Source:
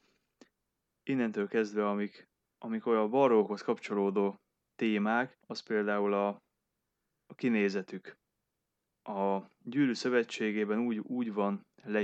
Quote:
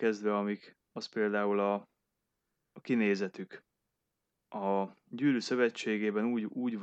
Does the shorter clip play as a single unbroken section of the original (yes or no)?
no